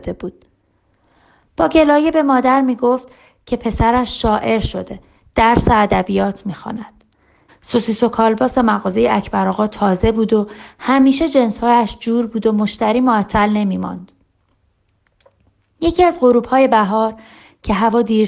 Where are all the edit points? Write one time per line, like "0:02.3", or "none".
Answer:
0:07.5